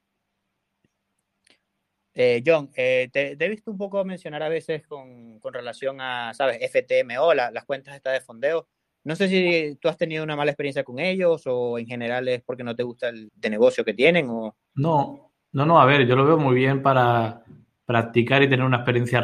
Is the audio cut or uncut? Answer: cut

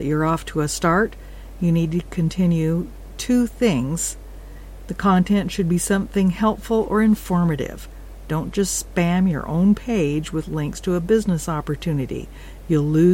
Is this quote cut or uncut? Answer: cut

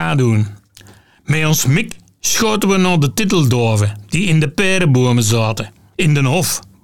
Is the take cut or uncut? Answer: uncut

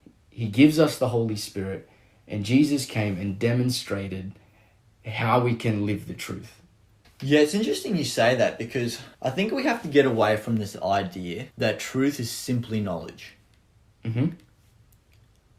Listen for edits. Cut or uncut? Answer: cut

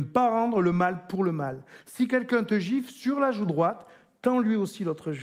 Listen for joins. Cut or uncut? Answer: uncut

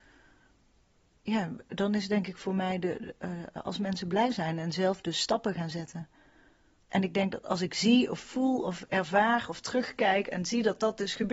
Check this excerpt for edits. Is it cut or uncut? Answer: cut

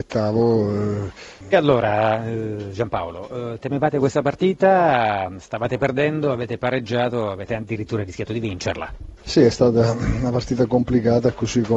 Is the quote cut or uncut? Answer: cut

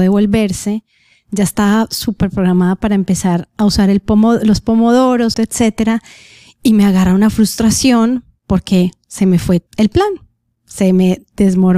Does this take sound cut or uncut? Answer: cut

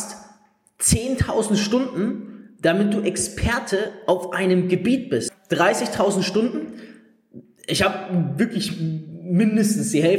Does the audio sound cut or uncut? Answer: cut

